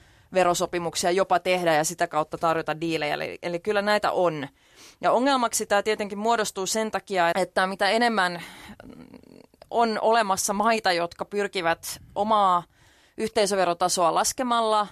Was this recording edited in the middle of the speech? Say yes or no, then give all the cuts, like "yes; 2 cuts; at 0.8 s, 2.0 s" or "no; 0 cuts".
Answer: yes; 1 cut; at 7.3 s